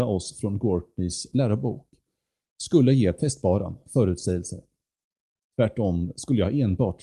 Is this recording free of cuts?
yes; 0 cuts

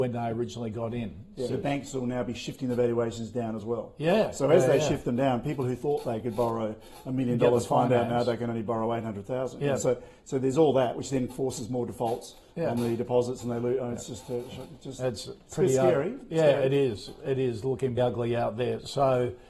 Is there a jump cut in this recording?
yes; 2 cuts; at 1.5 s, 18.0 s

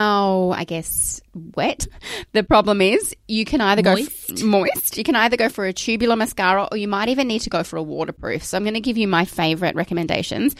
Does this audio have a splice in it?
no; 0 cuts

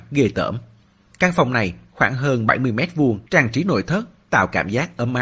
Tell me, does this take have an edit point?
yes; 2 cuts; at 1.1 s, 3.3 s

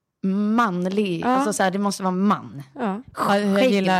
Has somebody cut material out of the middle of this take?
no; 0 cuts

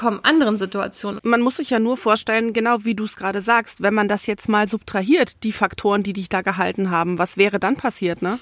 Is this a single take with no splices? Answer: no; 1 cut; at 1.2 s

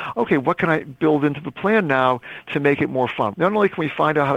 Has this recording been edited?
yes; 1 cut; at 3.3 s

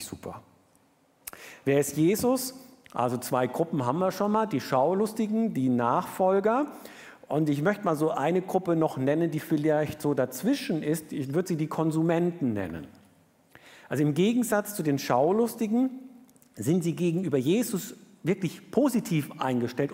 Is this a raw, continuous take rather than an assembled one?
yes; 0 cuts

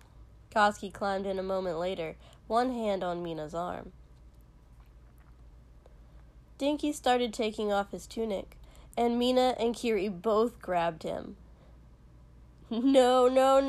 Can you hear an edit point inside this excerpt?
no; 0 cuts

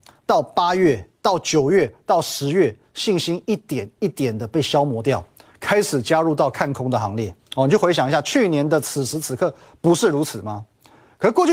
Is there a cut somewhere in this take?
yes; 1 cut; at 7.4 s

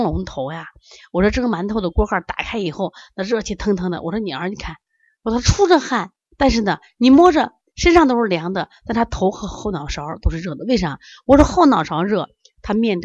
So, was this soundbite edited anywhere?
no; 0 cuts

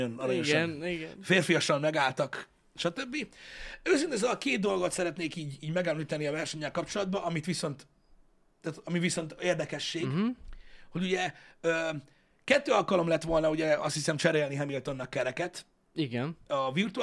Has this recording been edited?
no; 0 cuts

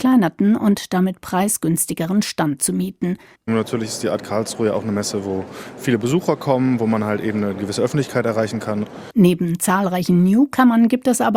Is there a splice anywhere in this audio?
yes; 2 cuts; at 3.4 s, 9.1 s

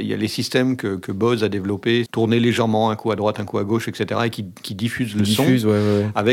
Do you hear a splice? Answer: yes; 1 cut; at 2.1 s

